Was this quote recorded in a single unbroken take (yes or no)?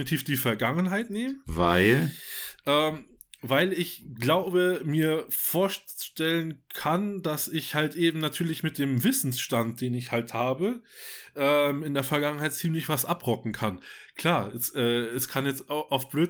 yes